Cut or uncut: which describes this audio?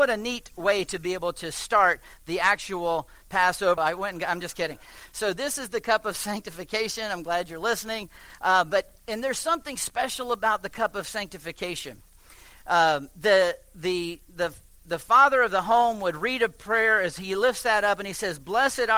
cut